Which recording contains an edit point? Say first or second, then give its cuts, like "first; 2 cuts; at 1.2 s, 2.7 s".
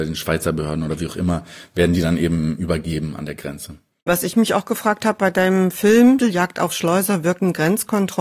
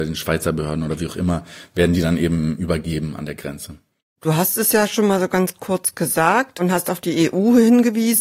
first; 2 cuts; at 4.1 s, 6.2 s